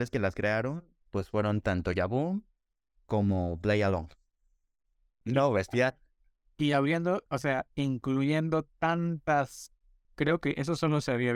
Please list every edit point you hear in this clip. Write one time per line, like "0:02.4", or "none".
0:05.2
0:07.3
0:10.0